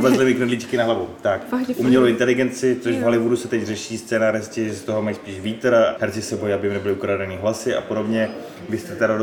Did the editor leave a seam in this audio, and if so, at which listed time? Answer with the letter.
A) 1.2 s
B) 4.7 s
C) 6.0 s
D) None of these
C